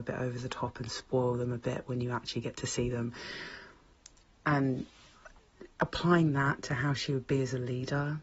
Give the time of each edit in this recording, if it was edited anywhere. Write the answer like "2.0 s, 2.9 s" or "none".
none

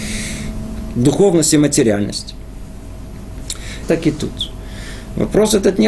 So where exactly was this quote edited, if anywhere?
0.9 s, 3.8 s

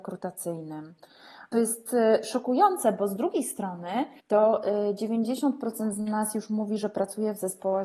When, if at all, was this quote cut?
1.5 s, 4.2 s

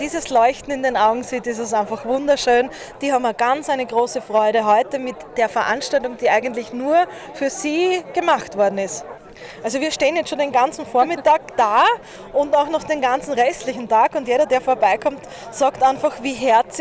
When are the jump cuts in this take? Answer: none

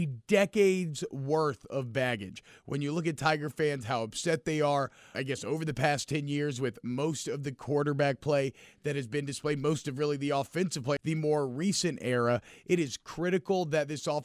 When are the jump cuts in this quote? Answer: 5.1 s, 11.0 s

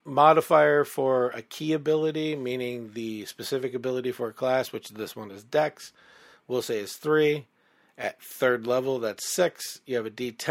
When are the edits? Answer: none

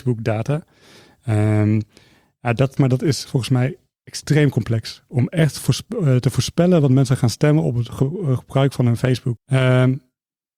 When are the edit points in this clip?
2.8 s, 9.4 s

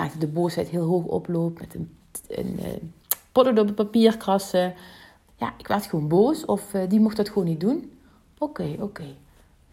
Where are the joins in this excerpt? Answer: 5.3 s

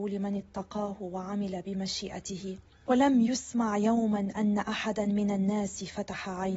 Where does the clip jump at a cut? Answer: none

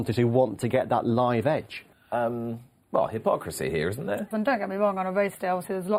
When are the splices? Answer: 1.9 s, 4.3 s

